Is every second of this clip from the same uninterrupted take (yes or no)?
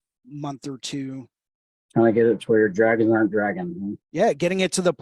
no